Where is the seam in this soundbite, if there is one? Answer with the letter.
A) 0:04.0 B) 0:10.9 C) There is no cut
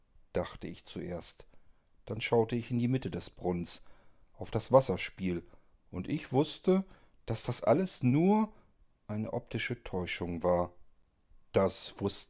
C